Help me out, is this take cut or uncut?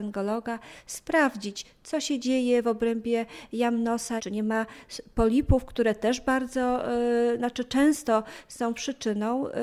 cut